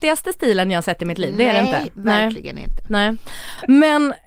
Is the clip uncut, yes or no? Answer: yes